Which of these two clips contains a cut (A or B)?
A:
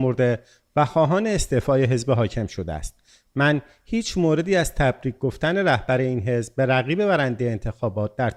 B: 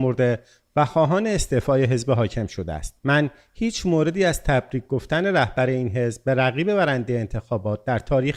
B